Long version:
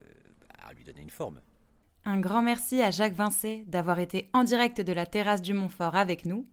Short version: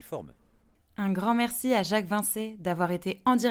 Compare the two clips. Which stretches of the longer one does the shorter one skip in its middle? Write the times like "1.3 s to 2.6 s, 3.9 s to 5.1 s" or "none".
none